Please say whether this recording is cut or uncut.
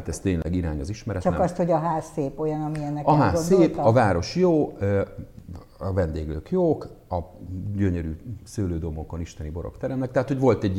uncut